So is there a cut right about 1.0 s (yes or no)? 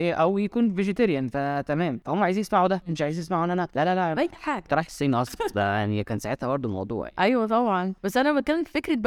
no